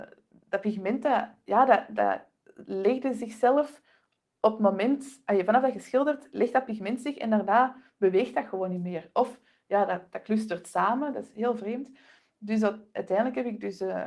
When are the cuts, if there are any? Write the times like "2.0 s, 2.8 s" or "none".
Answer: none